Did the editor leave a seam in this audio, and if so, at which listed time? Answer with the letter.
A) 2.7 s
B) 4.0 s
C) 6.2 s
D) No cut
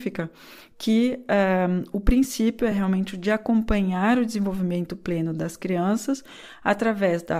D